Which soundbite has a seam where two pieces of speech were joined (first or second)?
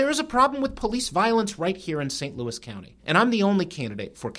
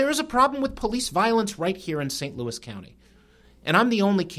first